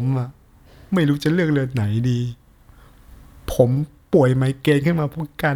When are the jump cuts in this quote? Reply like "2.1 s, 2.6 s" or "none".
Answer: none